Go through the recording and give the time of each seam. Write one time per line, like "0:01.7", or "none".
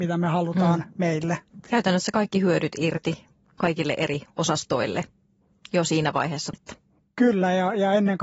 0:01.7
0:06.5